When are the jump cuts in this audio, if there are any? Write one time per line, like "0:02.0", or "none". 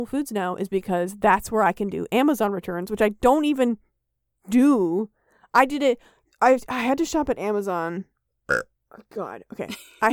0:08.3